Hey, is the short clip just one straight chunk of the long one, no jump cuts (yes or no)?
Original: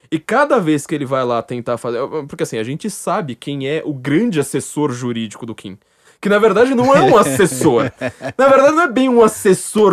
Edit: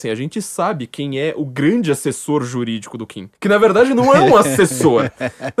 no